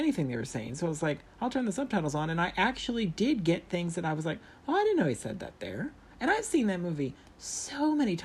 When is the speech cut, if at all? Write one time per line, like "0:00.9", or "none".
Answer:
none